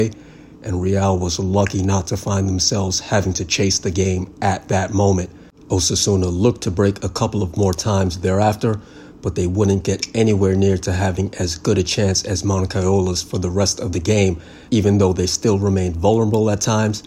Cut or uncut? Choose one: cut